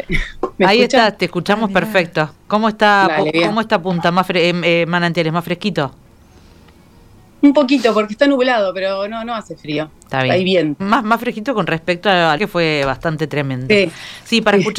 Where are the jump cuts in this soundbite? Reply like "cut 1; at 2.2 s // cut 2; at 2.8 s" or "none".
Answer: cut 1; at 10.8 s // cut 2; at 12.4 s